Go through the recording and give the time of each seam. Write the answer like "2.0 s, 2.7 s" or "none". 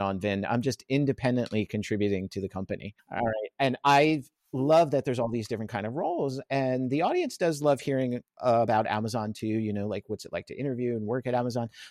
3.0 s